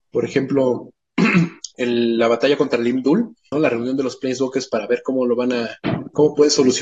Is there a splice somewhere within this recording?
yes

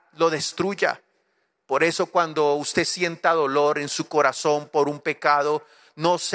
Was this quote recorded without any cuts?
yes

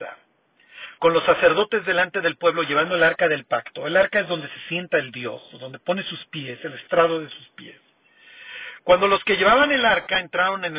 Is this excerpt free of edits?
yes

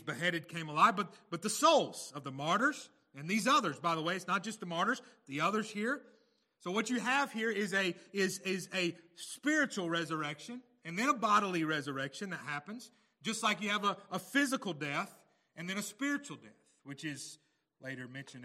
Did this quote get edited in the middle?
no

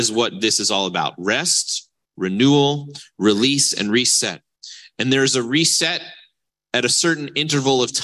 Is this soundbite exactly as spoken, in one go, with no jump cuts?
yes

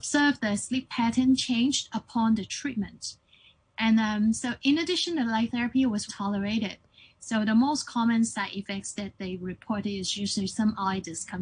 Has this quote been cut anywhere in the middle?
yes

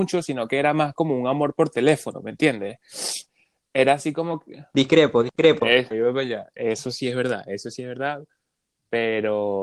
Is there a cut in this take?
yes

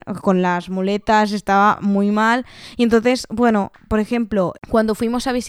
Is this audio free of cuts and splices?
yes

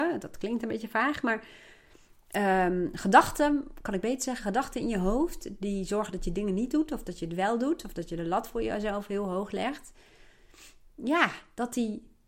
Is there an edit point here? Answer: no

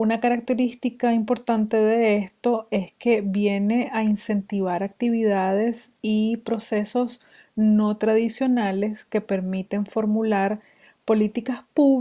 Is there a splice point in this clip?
no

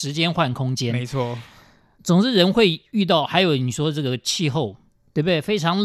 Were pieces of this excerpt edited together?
no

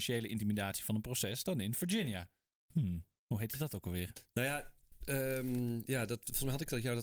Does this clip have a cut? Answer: no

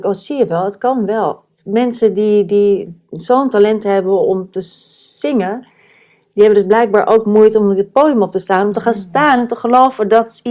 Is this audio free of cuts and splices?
yes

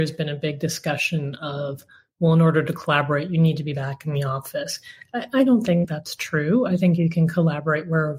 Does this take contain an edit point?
no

